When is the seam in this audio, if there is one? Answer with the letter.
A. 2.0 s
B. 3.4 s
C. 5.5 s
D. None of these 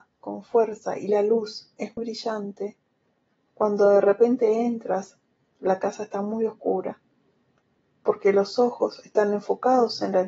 A